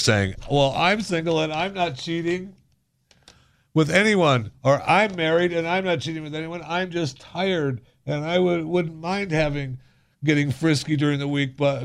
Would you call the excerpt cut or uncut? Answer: uncut